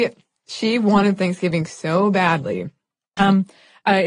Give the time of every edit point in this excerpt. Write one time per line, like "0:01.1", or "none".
0:03.2